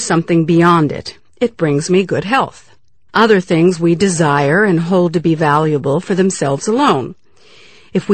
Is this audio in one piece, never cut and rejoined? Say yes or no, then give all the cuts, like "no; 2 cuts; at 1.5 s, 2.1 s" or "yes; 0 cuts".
no; 1 cut; at 3.1 s